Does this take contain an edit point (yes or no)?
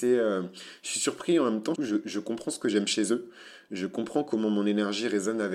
yes